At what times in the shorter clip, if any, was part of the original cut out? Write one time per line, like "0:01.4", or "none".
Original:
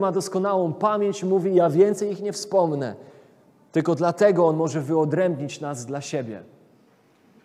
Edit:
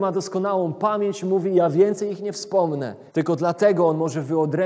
0:03.1

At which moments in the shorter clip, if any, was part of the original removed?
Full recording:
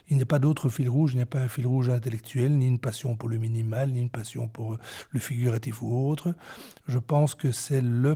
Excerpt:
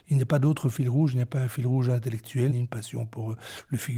0:02.5

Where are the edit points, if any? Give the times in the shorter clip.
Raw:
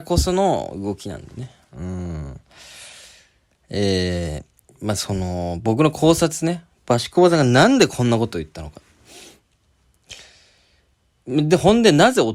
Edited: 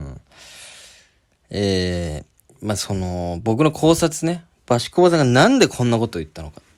none

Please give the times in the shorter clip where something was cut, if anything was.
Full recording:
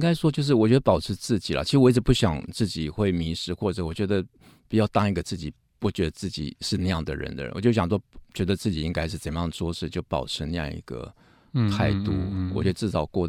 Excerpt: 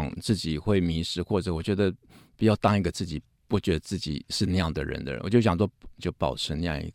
0:06.0

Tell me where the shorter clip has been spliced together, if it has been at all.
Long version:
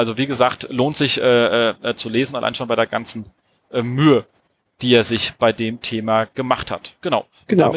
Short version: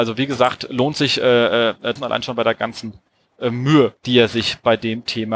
0:02.0
0:04.0

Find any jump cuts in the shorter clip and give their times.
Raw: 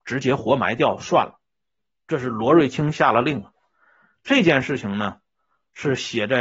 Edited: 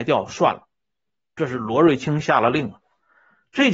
none

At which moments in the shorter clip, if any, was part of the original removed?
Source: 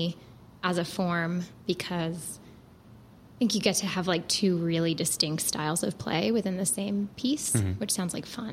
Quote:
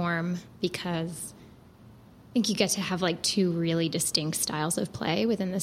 none

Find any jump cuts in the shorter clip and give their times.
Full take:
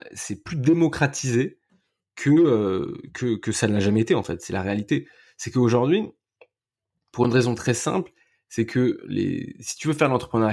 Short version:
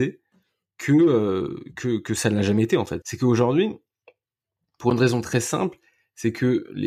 0:03.0

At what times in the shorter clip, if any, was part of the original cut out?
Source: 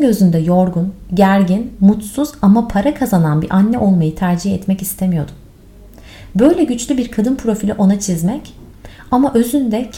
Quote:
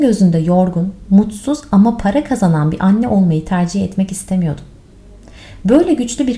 0:01.1

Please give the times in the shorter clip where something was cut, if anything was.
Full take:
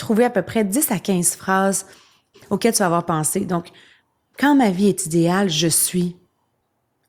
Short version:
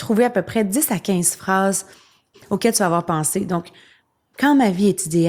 none

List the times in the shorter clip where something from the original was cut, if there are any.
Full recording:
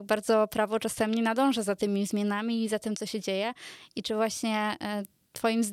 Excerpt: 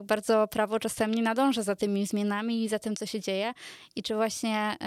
none

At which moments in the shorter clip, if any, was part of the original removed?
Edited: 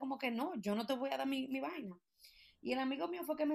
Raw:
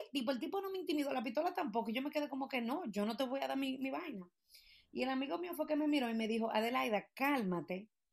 none

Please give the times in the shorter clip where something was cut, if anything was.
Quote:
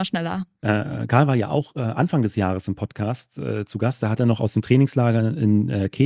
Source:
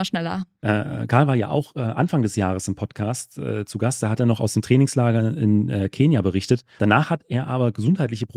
none

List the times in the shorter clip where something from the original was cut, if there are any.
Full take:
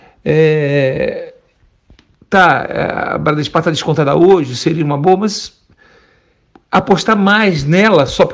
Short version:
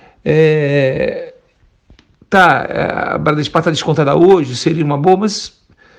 none

